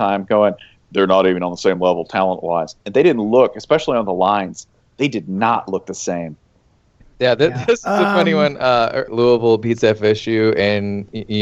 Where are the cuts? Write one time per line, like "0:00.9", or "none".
0:09.1